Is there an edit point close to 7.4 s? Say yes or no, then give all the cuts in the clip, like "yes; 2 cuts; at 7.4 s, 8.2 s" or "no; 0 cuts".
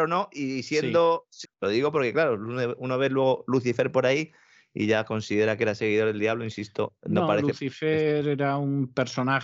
no; 1 cut; at 1.4 s